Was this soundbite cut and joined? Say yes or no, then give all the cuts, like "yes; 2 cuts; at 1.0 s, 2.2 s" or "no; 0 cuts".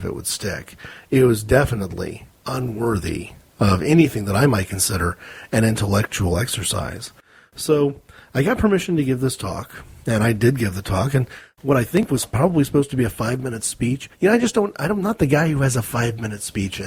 no; 0 cuts